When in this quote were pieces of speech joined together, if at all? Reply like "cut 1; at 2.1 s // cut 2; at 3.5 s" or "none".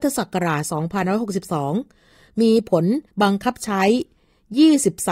cut 1; at 3.1 s